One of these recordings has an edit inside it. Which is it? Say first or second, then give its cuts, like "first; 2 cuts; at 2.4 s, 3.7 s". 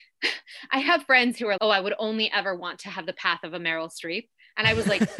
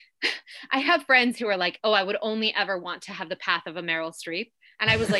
first; 1 cut; at 1.6 s